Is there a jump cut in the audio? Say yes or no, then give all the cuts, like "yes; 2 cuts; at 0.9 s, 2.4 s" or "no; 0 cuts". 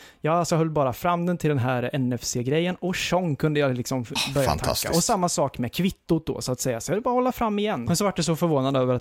yes; 2 cuts; at 4.2 s, 7.9 s